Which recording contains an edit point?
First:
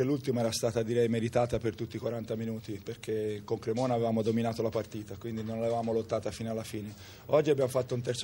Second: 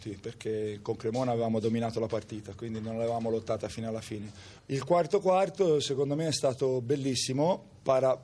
second; 1 cut; at 4.6 s

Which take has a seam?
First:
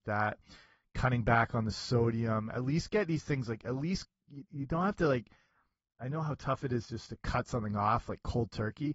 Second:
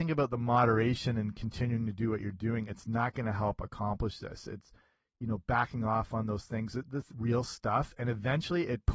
second; 1 cut; at 7.1 s

